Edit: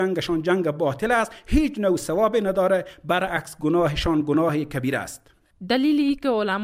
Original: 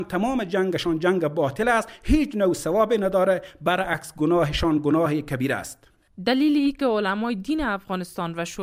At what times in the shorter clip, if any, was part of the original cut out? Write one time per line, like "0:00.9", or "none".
none